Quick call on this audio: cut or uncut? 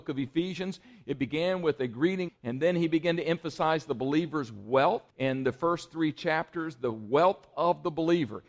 cut